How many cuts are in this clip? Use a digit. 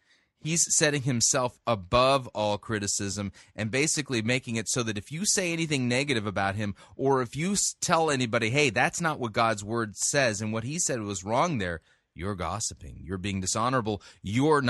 0